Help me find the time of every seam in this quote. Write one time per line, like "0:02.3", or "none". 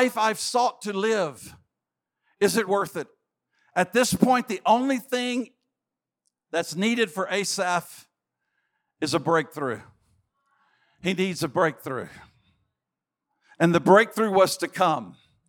0:02.7